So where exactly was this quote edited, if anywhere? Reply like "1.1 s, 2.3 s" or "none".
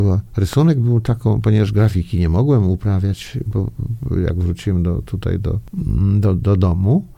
none